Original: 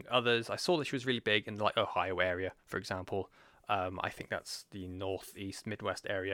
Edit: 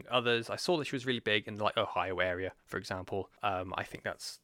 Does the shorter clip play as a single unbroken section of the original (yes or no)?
no